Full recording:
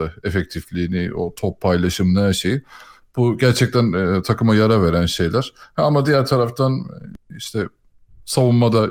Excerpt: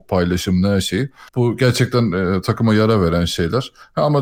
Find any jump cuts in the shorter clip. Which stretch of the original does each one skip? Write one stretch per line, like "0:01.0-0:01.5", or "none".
0:02.8-0:03.1

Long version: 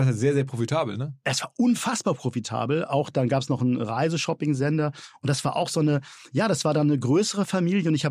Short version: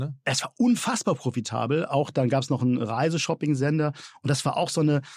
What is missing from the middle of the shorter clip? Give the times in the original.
none

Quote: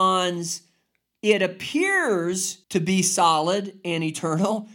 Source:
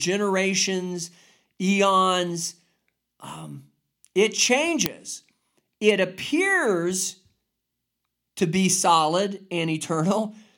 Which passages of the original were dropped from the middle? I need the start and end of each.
0:03.1-0:05.7
0:07.2-0:08.3

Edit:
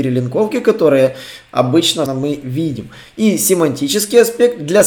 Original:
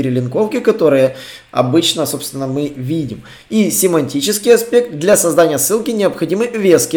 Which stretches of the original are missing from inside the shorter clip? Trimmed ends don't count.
0:02.1-0:02.4

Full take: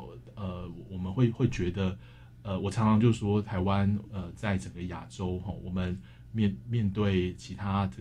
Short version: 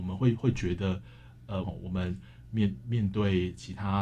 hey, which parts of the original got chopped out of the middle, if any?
0:02.6-0:05.4

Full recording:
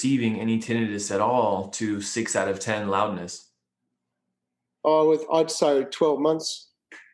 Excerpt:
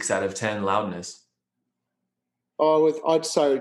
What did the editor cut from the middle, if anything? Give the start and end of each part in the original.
none

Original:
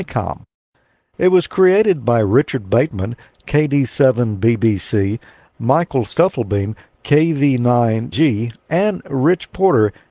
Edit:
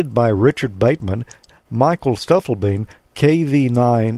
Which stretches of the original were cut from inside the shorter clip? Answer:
0:03.4-0:05.4

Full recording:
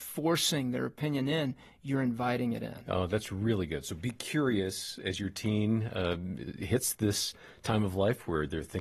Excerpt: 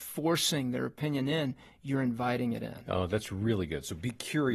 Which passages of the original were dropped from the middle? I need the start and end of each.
none

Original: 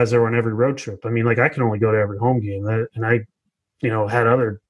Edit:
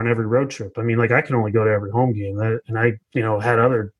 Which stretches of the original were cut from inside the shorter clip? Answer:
0:03.3-0:03.7

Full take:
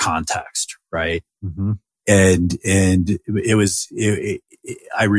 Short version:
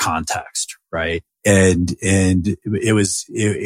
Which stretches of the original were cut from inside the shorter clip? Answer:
0:01.4-0:02.0

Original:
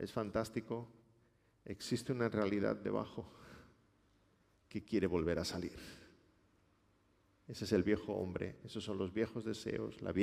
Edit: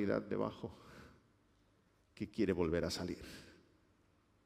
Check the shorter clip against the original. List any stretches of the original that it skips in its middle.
none

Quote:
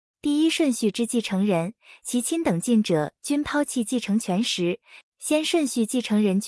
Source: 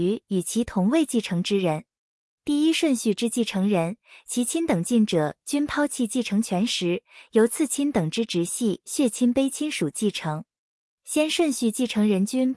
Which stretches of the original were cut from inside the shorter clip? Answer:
0:07.2-0:10.9

